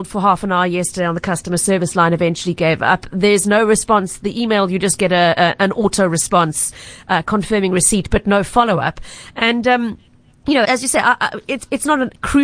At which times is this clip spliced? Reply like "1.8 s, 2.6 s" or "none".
10.6 s